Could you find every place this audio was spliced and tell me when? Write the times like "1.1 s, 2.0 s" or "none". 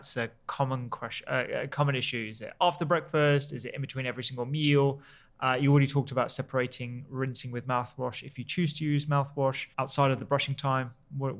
9.7 s